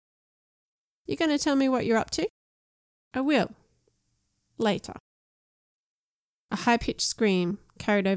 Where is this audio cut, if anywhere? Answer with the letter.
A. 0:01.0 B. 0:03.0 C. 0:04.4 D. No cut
D